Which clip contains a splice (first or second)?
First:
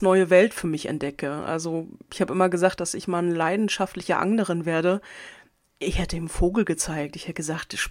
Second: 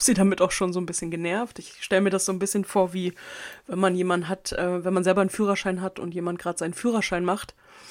first